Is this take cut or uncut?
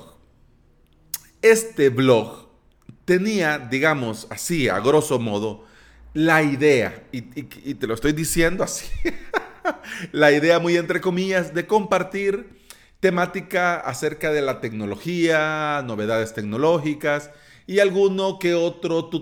uncut